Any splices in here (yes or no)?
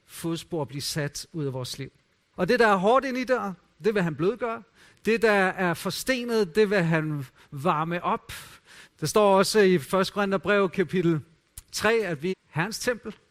yes